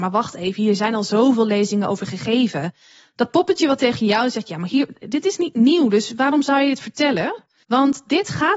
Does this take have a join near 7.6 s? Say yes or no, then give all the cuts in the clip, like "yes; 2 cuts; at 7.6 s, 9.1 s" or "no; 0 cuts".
yes; 1 cut; at 7.6 s